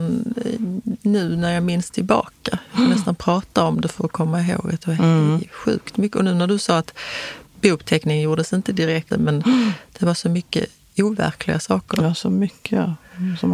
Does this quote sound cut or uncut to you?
cut